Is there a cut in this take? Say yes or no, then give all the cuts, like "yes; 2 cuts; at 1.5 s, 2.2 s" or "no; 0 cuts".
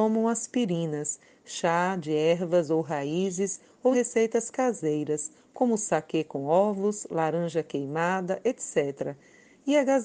yes; 1 cut; at 3.9 s